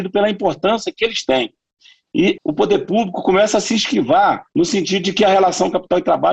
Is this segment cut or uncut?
cut